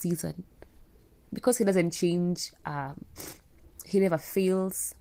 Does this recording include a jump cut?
no; 0 cuts

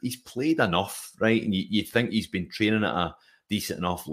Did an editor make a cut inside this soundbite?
no; 0 cuts

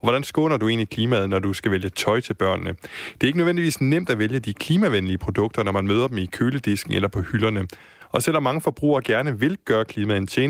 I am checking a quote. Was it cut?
no; 0 cuts

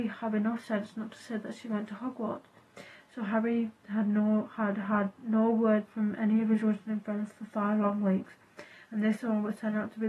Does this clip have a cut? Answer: no; 0 cuts

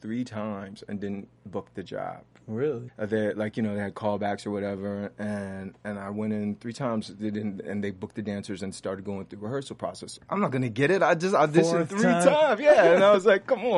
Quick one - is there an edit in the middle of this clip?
yes; 2 cuts; at 2.9 s, 10.2 s

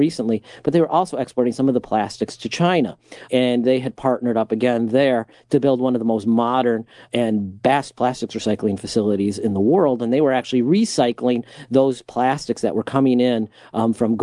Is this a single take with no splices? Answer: yes; 0 cuts

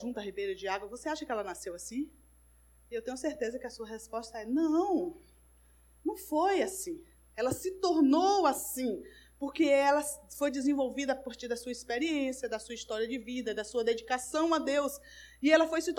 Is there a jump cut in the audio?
no; 0 cuts

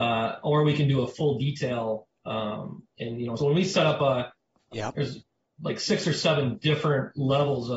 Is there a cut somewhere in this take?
yes; 2 cuts; at 3.4 s, 4.7 s

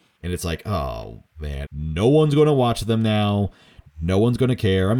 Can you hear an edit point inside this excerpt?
yes; 1 cut; at 1.6 s

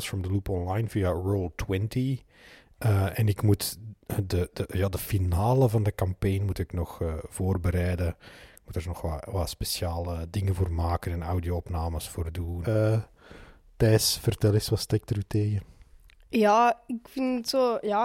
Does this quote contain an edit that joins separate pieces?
yes; 1 cut; at 12.6 s

